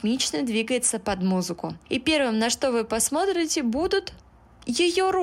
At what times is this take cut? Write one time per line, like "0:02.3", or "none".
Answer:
none

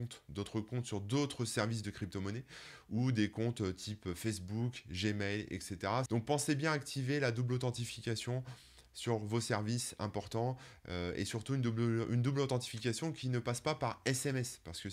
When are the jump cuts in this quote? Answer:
0:06.1

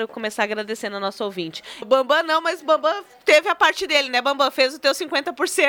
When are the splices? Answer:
0:01.8

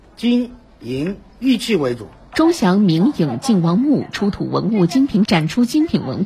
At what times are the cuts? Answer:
0:02.3
0:05.3

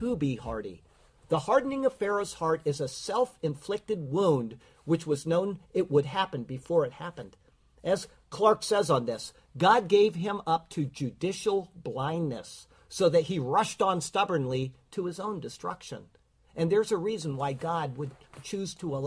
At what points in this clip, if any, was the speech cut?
none

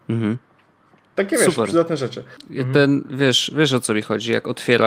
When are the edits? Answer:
0:02.4

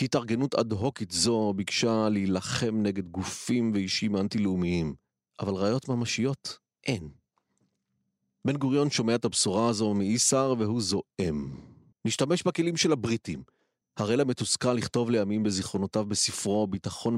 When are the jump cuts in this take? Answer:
0:11.9
0:13.8

